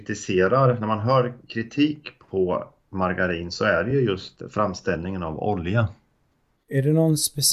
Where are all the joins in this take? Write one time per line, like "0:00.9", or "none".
none